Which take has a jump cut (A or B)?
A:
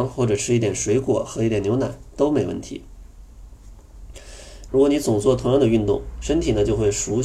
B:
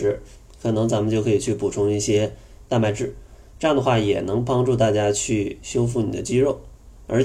A